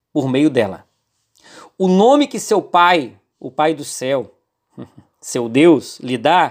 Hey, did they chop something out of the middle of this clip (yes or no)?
no